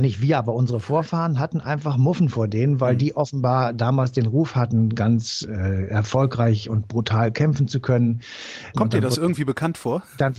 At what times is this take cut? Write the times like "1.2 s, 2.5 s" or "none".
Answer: 8.7 s